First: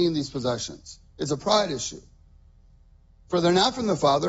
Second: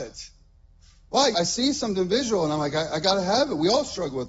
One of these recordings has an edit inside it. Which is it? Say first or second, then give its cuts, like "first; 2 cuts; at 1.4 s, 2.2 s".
second; 1 cut; at 1.3 s